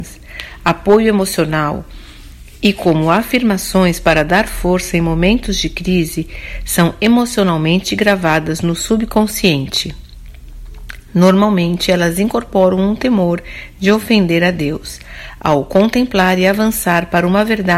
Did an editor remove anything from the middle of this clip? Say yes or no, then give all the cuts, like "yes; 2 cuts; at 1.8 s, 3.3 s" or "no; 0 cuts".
no; 0 cuts